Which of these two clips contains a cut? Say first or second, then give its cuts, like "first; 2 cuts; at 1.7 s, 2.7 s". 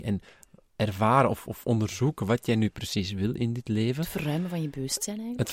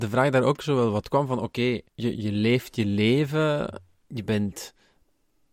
second; 1 cut; at 1.9 s